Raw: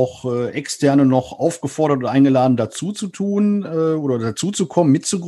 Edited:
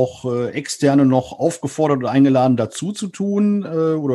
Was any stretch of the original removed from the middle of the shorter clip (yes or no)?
no